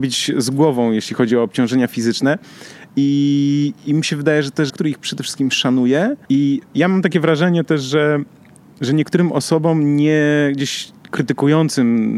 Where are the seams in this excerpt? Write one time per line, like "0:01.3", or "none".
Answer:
0:02.9
0:04.7
0:06.3